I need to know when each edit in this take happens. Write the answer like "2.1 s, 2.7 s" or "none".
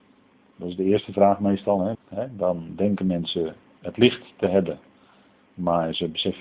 1.9 s